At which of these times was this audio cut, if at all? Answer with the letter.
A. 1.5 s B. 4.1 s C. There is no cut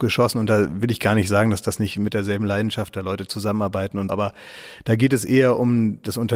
B